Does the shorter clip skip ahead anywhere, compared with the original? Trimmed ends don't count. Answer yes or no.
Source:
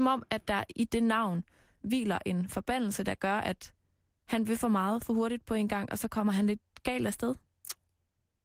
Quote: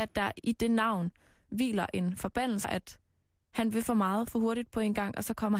yes